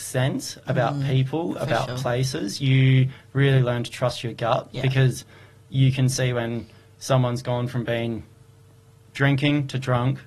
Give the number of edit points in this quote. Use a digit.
0